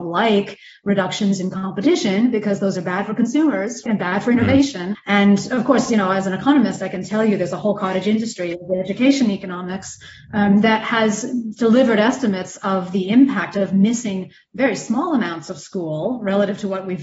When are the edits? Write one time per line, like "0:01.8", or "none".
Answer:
0:03.9
0:04.9